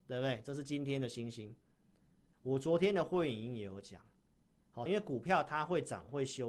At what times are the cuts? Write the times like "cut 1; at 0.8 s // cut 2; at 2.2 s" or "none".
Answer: cut 1; at 2.3 s // cut 2; at 4.9 s